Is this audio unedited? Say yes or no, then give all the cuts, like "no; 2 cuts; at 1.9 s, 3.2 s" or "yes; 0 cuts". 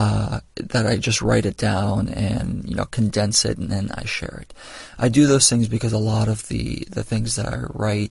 yes; 0 cuts